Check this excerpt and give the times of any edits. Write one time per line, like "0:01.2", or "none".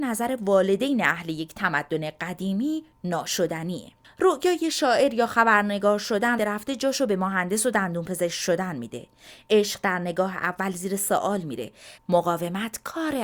0:06.4
0:12.0

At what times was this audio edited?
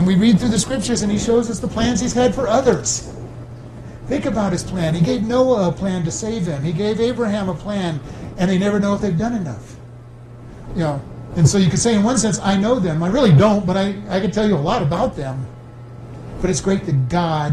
0:08.3
0:10.7

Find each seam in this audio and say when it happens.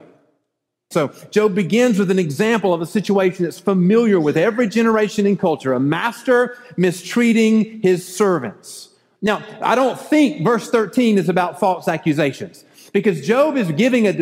0:00.9

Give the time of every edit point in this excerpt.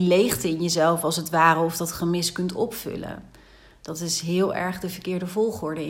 none

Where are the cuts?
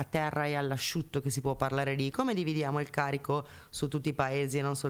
0:02.1

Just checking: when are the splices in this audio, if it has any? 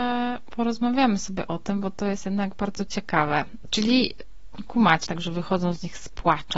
0:03.6
0:05.1

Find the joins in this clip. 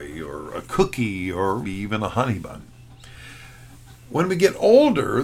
0:01.6

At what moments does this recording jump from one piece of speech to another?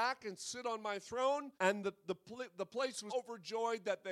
0:01.5
0:03.1

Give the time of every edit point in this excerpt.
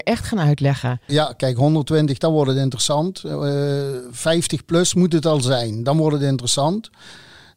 0:01.1

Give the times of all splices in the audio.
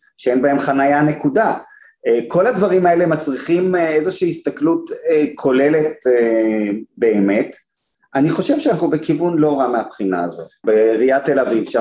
0:10.6

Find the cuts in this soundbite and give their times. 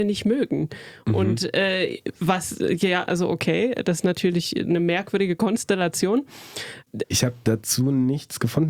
0:03.1
0:07.0

